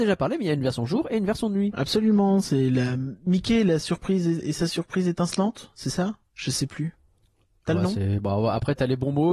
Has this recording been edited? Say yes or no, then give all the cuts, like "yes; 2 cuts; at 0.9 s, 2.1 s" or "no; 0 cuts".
no; 0 cuts